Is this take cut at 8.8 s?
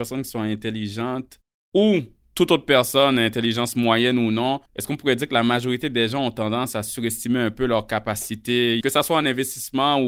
yes; 2 cuts; at 4.7 s, 8.8 s

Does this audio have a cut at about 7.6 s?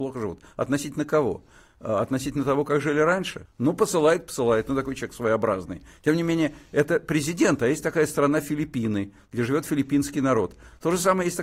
no; 1 cut; at 3.5 s

